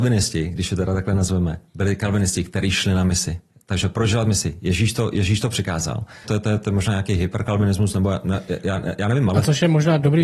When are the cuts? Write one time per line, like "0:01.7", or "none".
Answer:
0:06.2